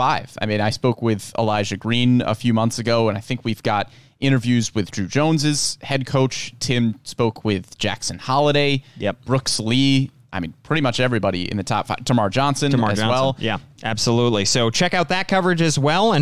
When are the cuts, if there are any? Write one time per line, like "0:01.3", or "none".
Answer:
0:13.8